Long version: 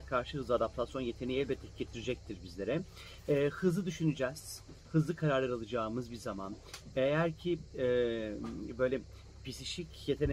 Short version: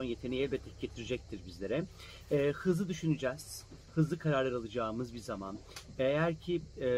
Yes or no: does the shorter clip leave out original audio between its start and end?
no